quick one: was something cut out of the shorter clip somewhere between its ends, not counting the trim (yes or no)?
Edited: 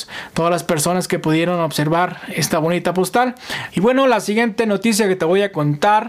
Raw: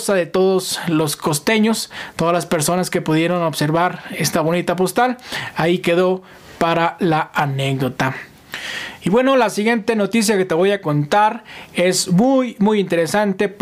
yes